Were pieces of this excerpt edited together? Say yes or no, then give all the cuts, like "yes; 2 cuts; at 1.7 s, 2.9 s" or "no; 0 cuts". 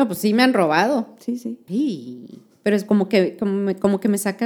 yes; 1 cut; at 1.7 s